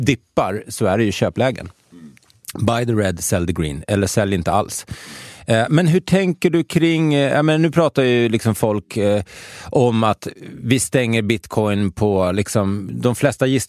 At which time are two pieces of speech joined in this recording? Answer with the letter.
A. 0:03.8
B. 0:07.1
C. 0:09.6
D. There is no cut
D